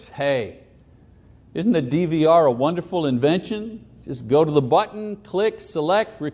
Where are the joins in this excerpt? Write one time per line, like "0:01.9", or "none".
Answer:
none

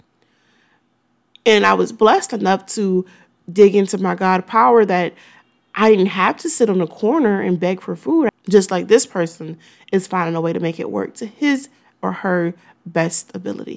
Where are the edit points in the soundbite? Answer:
0:08.3

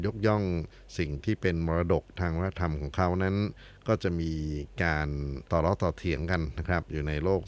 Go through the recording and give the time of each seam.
0:05.4

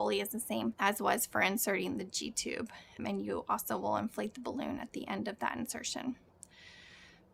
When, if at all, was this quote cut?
0:03.0

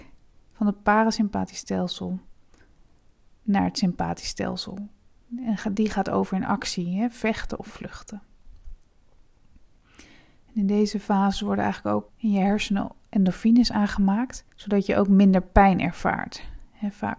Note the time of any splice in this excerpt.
0:12.1
0:14.5

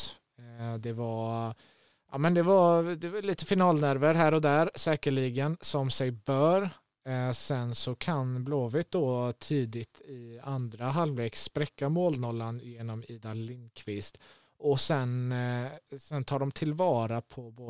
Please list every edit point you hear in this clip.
none

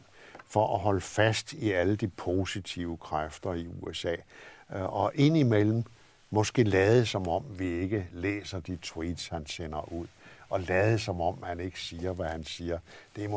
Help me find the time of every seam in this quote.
none

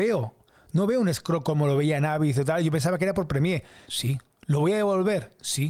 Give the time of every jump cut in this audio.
0:03.8

